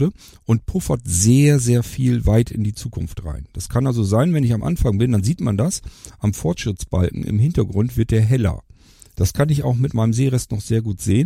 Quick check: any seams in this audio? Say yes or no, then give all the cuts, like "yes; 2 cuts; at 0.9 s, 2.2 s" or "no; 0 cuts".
no; 0 cuts